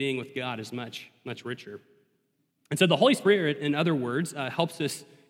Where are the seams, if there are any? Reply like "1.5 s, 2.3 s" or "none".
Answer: none